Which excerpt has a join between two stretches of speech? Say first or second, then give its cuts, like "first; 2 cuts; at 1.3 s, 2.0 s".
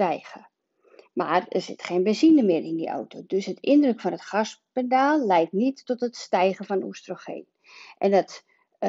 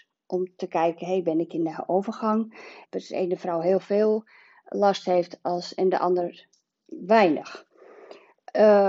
second; 1 cut; at 2.8 s